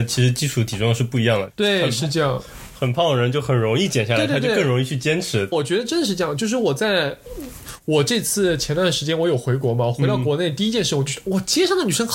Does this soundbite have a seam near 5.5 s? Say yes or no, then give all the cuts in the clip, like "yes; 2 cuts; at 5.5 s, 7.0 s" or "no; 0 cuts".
yes; 1 cut; at 5.5 s